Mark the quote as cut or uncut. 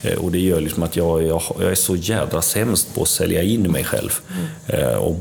uncut